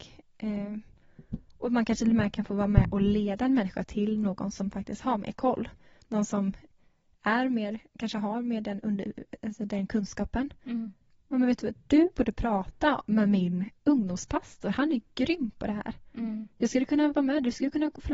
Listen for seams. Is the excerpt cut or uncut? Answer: uncut